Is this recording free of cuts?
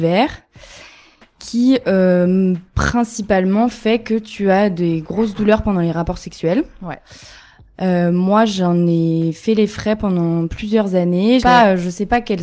no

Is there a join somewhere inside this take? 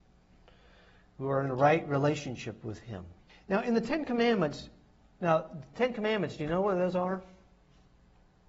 yes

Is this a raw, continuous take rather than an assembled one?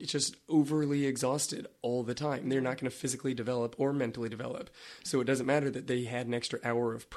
yes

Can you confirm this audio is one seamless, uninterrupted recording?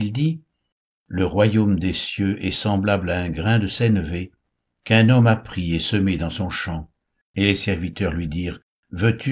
no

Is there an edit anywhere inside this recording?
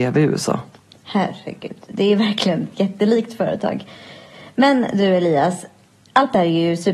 no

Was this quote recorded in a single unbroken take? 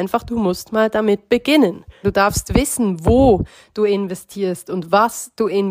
no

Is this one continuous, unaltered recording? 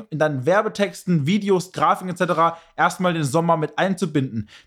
yes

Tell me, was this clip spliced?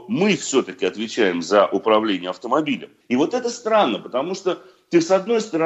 yes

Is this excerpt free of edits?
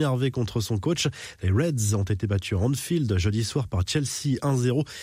no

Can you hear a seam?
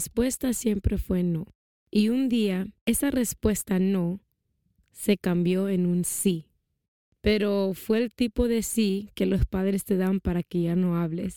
no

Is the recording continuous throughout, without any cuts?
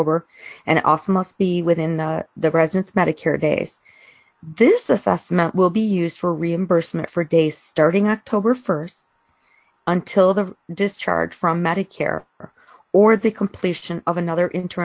yes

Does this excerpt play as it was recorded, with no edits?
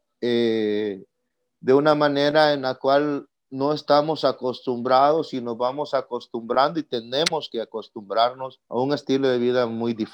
no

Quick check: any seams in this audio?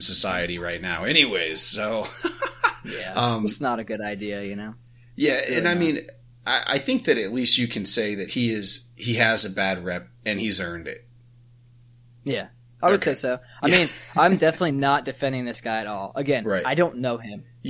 no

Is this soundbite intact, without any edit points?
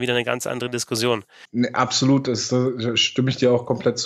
no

